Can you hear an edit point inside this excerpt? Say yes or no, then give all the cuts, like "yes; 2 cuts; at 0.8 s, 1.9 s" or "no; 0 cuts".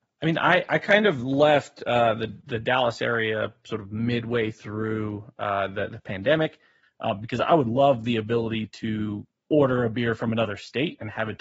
yes; 2 cuts; at 6.8 s, 9.4 s